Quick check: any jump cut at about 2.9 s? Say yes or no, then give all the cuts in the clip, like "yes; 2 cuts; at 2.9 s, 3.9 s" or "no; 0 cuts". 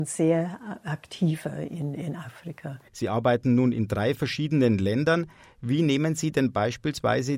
yes; 1 cut; at 2.9 s